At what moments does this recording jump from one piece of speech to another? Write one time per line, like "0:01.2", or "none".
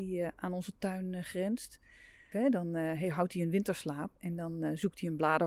0:02.3